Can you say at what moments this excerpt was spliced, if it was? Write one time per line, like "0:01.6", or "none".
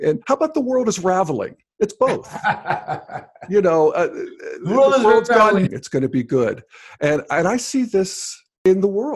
0:05.7